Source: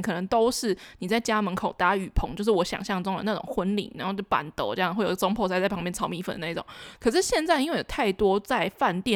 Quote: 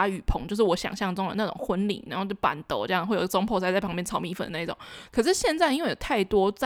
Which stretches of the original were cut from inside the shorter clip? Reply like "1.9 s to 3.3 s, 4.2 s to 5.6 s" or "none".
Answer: none

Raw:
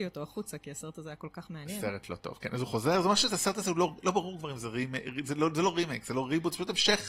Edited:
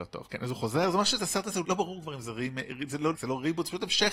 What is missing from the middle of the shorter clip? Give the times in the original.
3.7 s to 4.0 s, 5.5 s to 6.0 s

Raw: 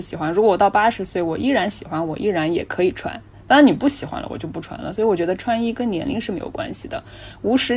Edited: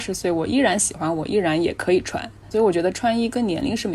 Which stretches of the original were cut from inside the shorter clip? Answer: 3.4 s to 4.9 s

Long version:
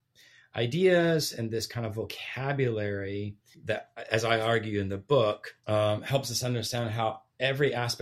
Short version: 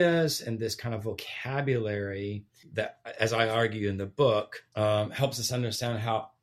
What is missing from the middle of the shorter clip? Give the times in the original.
none

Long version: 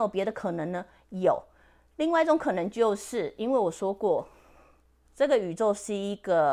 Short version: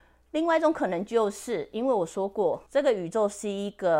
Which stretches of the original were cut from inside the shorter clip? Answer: 4.3 s to 5.1 s

